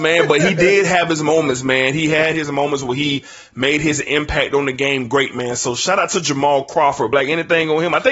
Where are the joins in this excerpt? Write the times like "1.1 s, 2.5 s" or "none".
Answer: none